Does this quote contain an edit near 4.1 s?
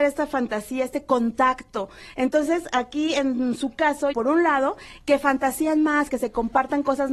yes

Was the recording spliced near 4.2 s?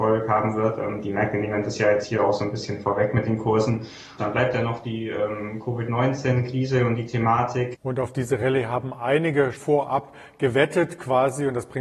yes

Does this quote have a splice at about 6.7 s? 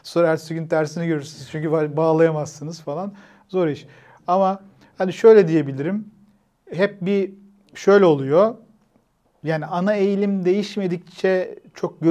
yes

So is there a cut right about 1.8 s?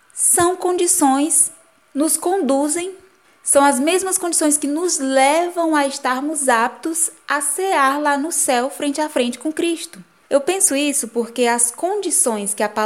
yes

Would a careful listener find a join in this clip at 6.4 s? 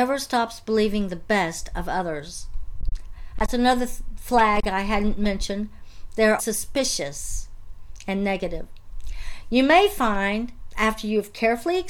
yes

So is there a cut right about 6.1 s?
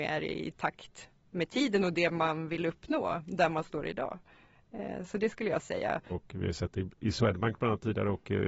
yes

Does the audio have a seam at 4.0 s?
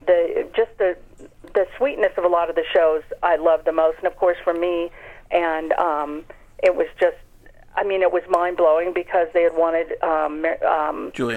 no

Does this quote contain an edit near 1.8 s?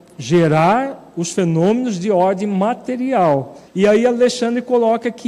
no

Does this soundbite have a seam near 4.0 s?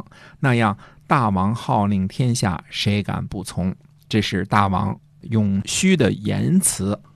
no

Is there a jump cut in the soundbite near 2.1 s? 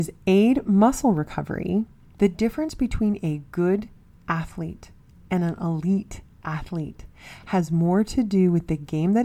yes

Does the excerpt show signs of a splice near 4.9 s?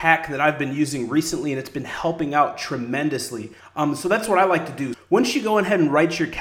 yes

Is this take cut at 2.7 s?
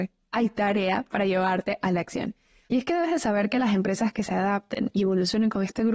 yes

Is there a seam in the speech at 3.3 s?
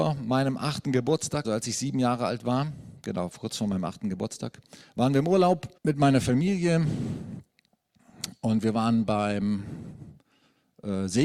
no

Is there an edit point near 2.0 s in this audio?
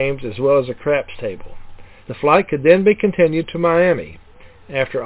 yes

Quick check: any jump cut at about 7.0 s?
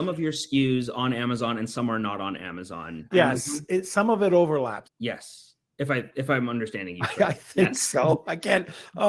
no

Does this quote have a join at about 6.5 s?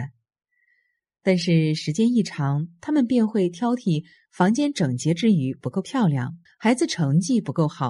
yes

